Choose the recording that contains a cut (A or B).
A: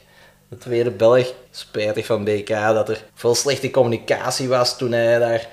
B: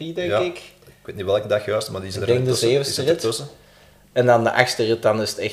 A